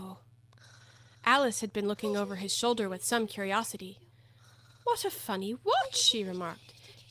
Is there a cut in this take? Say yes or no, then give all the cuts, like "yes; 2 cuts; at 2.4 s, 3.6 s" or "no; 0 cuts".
no; 0 cuts